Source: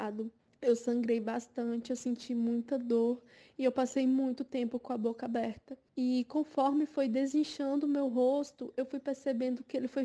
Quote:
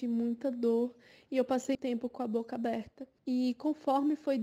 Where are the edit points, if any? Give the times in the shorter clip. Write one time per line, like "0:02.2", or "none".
0:01.7

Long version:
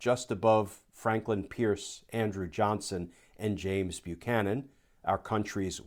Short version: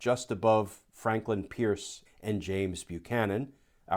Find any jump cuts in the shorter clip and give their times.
0:02.1

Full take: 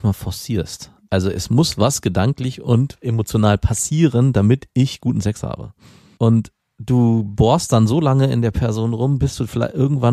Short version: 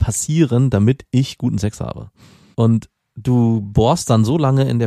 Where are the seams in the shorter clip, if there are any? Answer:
none

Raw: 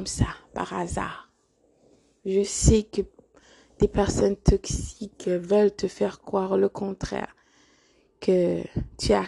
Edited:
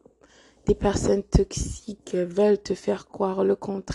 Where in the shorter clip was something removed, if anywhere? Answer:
none

